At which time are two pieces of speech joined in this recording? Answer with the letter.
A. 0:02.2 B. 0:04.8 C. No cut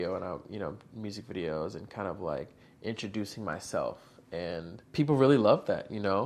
B